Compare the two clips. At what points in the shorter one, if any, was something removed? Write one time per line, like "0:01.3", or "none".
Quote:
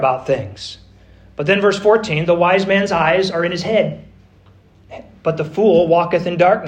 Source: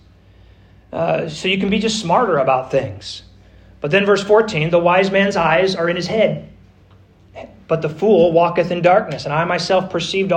none

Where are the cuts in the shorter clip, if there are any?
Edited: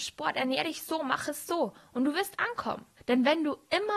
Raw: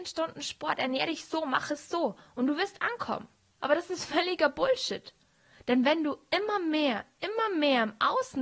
0:03.0

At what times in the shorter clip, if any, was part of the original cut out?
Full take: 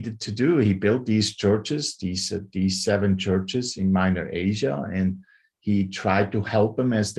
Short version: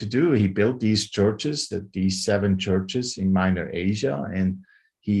0:01.7

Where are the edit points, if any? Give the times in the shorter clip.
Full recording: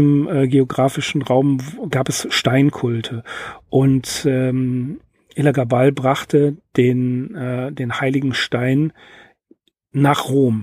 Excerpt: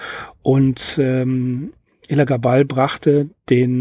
none

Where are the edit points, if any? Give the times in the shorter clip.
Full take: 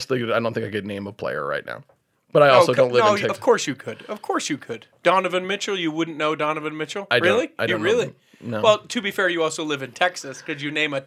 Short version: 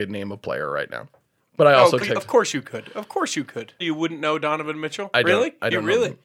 0:02.0
0:03.8

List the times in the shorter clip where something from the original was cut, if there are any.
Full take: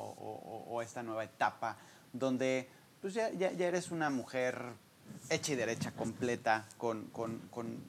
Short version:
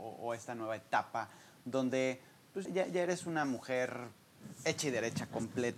0:02.7

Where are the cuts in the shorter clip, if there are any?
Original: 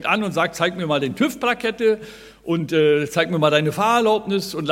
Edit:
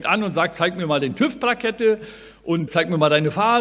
0:02.7

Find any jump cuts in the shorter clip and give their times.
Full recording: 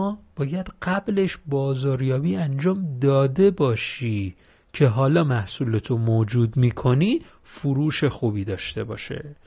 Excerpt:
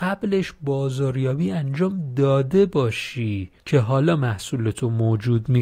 0:03.6

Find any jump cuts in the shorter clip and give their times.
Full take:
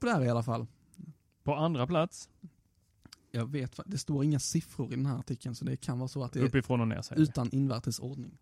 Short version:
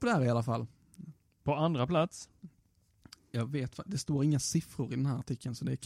none

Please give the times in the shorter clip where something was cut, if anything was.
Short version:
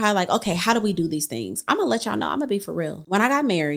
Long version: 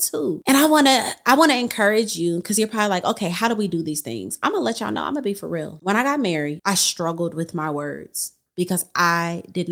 none

